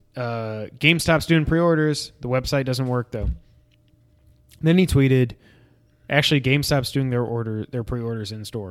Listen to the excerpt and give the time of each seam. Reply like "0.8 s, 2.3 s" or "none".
none